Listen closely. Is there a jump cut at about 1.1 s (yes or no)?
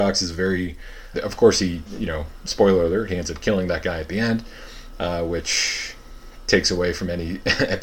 yes